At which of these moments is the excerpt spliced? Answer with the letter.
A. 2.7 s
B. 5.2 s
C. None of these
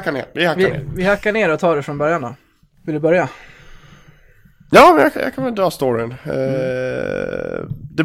B